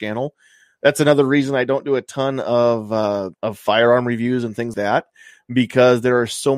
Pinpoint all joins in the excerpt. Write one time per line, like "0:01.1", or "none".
0:03.3
0:04.7

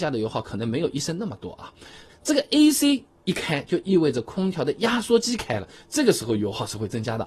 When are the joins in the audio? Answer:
0:02.1

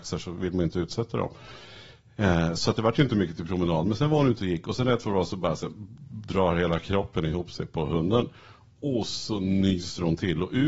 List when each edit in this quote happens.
none

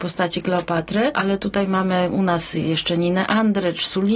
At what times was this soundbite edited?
none

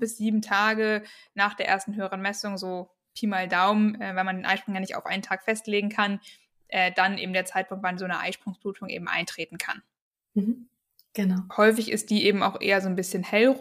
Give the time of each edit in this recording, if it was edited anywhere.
0:11.5

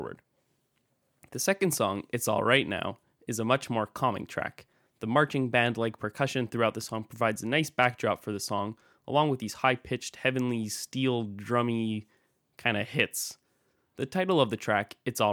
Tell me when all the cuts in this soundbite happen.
none

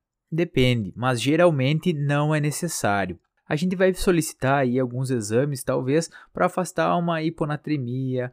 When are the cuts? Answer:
none

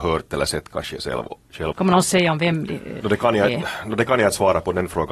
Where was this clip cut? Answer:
0:01.7
0:03.0

